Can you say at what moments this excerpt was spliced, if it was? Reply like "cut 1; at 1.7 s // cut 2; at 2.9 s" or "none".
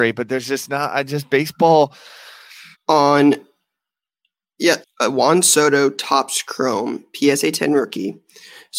cut 1; at 2.7 s // cut 2; at 4.8 s